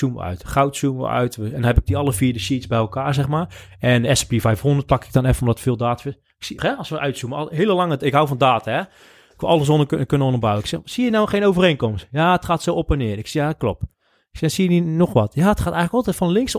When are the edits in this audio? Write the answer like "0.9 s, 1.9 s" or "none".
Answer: 6.6 s